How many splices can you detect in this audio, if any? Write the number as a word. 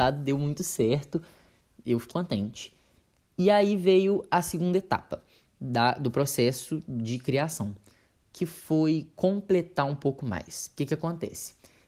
one